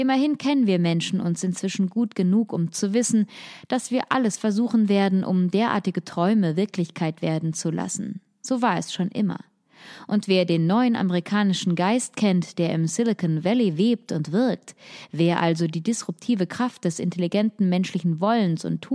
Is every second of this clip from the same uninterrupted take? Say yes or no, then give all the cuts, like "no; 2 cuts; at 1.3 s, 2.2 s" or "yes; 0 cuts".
yes; 0 cuts